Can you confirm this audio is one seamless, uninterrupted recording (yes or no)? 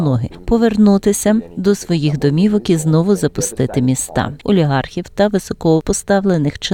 no